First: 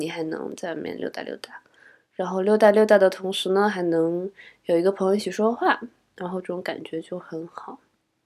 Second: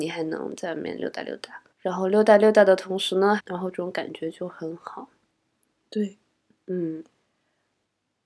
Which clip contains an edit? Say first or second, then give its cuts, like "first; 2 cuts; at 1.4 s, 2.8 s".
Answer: second; 2 cuts; at 1.7 s, 3.4 s